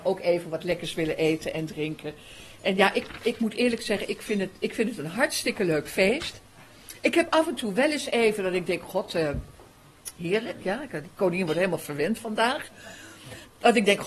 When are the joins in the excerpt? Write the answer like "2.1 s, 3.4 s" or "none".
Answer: none